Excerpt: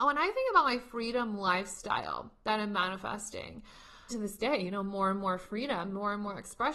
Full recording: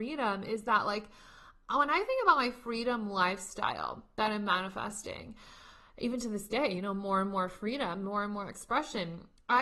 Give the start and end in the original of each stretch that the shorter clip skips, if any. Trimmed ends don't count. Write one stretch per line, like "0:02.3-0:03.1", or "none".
0:05.8-0:06.2

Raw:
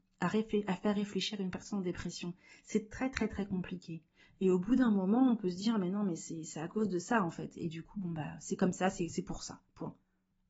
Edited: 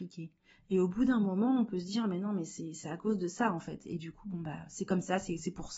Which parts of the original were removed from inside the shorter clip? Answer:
none

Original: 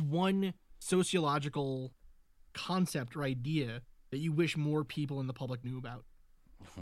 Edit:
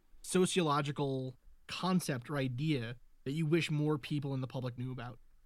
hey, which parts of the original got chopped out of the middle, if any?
0:02.2-0:02.5

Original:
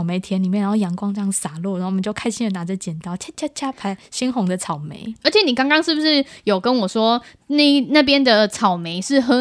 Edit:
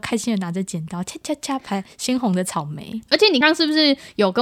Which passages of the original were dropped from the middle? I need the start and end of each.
0:05.5-0:05.7

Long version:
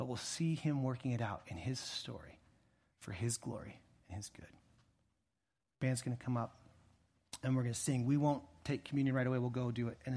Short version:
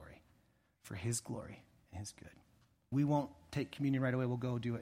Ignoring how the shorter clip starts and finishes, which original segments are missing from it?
0:05.1-0:08.0

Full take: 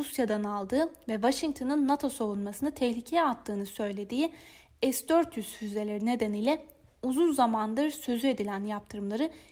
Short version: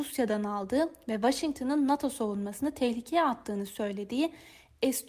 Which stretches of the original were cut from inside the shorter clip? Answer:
none

